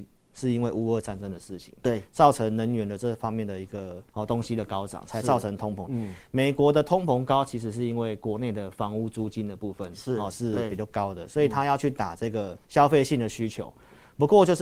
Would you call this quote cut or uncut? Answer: cut